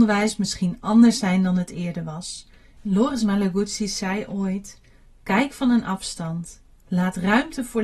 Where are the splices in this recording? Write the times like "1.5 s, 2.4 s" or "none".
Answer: 2.8 s